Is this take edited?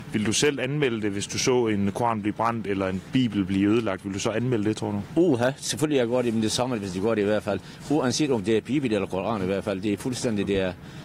no; 0 cuts

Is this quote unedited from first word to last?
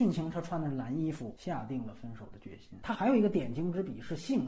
no; 1 cut; at 2.8 s

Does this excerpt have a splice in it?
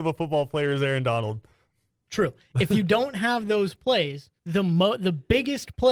yes; 1 cut; at 4.4 s

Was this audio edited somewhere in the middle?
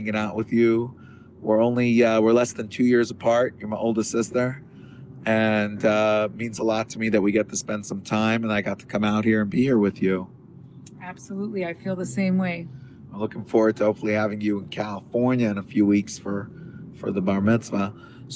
no; 0 cuts

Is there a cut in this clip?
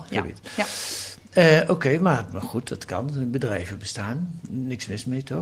no; 0 cuts

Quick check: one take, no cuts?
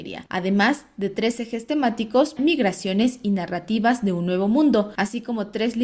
no; 1 cut; at 2.4 s

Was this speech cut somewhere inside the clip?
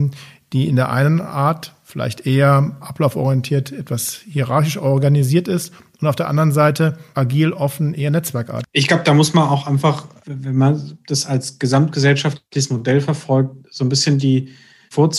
yes; 1 cut; at 8.6 s

